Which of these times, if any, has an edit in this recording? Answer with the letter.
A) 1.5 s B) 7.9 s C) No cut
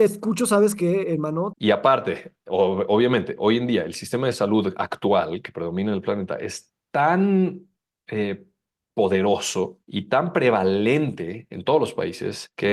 A